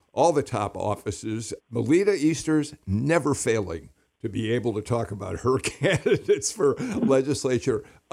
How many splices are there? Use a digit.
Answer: 1